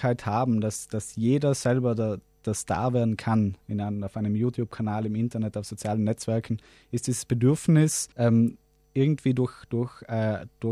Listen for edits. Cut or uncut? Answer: cut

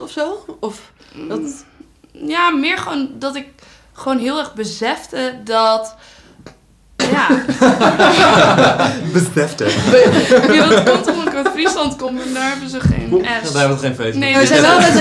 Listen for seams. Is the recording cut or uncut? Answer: uncut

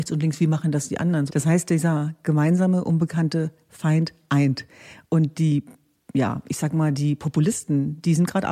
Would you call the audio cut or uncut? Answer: cut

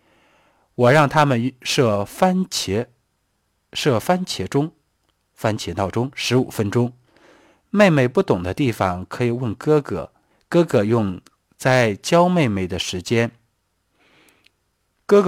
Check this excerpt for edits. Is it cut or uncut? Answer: uncut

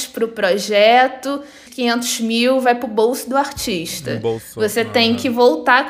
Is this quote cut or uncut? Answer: cut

